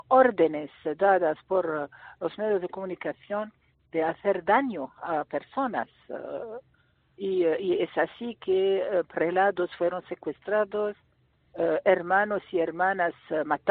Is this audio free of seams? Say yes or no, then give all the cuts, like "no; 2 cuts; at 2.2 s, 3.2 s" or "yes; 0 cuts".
yes; 0 cuts